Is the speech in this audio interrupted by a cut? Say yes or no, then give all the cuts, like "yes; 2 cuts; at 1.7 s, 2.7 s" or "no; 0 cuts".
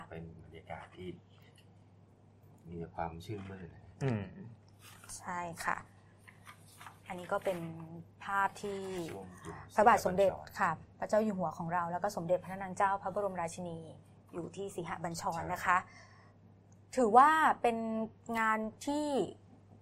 no; 0 cuts